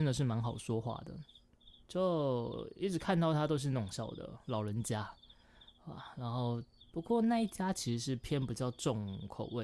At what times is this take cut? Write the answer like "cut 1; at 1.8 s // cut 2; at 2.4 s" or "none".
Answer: cut 1; at 3.9 s // cut 2; at 6.8 s